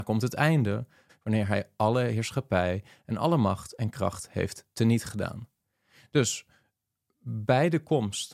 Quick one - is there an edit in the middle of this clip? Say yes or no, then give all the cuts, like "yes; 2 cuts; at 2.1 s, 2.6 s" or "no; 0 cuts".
yes; 1 cut; at 1.1 s